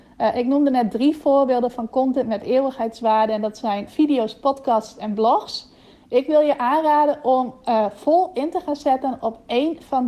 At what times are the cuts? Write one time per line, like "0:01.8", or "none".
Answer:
0:03.9